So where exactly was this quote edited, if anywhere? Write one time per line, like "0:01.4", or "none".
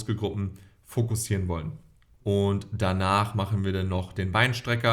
0:02.2